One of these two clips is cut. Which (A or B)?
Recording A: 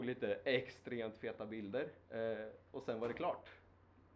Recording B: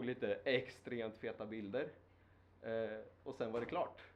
A